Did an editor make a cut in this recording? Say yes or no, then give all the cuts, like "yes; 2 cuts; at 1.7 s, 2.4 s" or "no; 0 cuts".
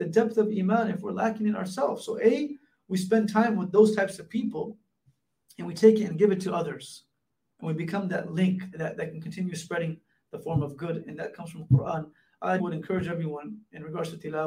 yes; 2 cuts; at 8.7 s, 12.6 s